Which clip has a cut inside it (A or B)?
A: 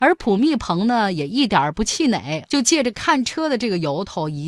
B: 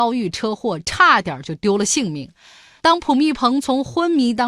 A